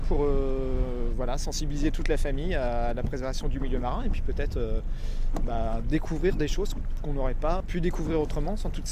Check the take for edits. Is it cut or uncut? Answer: cut